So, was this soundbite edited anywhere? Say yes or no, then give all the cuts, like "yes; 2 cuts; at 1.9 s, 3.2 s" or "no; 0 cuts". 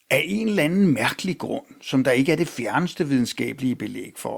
no; 0 cuts